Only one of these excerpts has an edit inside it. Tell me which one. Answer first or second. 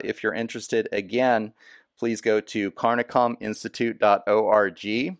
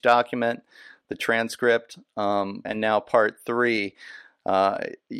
second